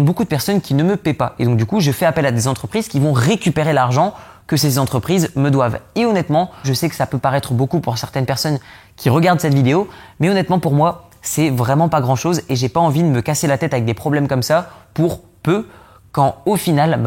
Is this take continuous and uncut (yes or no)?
no